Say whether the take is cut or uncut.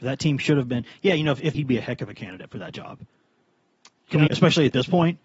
cut